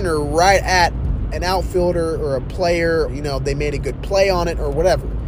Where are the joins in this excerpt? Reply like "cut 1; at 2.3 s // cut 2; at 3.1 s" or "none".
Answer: cut 1; at 3.1 s